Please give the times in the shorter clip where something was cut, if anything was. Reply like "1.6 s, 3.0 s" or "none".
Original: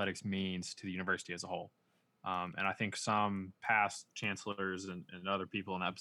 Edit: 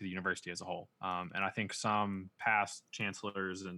0.9 s